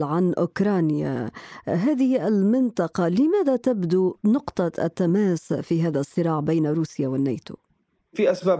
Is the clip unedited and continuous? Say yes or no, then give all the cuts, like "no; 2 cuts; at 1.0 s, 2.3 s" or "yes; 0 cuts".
yes; 0 cuts